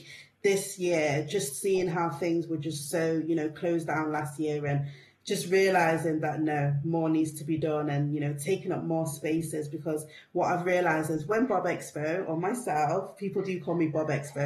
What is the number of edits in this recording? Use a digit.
0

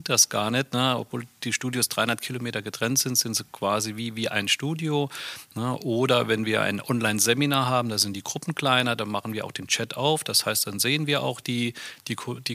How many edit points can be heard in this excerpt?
0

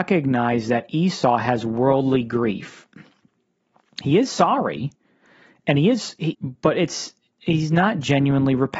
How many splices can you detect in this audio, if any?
1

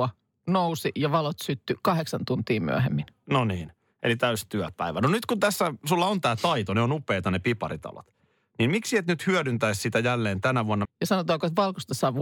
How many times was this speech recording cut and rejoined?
1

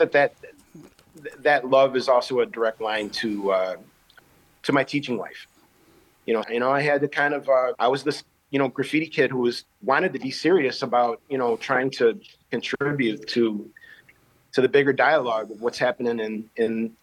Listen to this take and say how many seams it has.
3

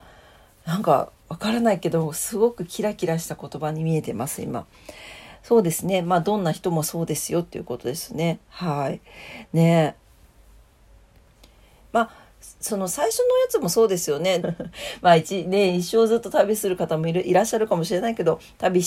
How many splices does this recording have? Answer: 1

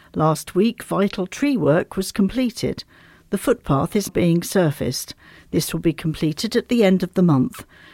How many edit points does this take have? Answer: 1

